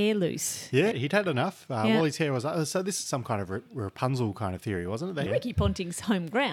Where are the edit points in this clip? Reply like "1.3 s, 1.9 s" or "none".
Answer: 0.9 s, 5.3 s